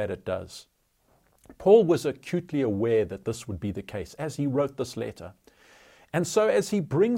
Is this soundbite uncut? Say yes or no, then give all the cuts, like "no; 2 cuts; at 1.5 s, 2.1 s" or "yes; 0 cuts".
yes; 0 cuts